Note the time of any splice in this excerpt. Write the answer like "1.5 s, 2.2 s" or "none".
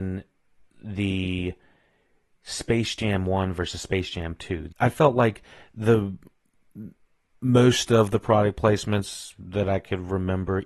4.7 s